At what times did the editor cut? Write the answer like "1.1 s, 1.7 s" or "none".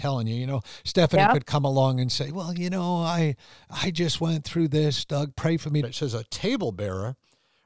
5.8 s